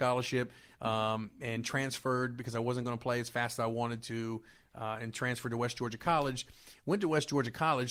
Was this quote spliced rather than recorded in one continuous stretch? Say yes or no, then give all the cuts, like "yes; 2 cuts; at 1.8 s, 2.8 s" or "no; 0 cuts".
no; 0 cuts